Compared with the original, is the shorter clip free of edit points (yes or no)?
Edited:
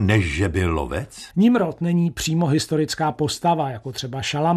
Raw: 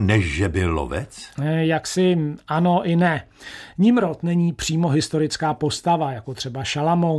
no